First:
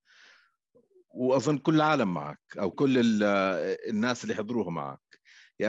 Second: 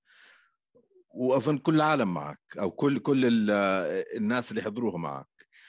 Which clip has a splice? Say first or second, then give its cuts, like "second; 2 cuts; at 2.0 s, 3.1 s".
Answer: first; 1 cut; at 2.7 s